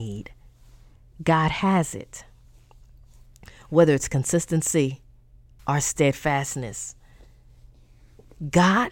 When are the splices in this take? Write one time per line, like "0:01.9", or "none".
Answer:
0:05.6